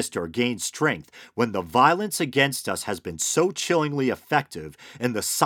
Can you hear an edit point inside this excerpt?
no; 0 cuts

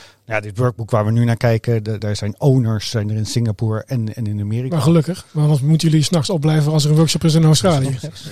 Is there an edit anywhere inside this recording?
yes; 1 cut; at 2.0 s

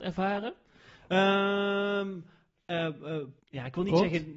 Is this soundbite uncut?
no; 1 cut; at 3.4 s

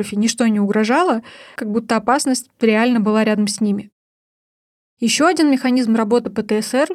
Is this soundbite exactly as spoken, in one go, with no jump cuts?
no; 1 cut; at 1.6 s

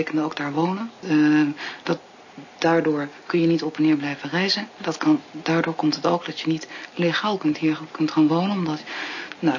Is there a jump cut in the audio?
yes; 1 cut; at 1.0 s

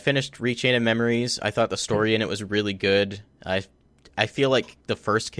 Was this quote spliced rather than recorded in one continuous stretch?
no; 0 cuts

